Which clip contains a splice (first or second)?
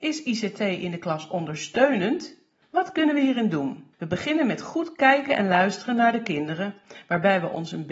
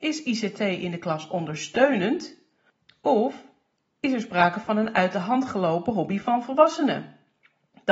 first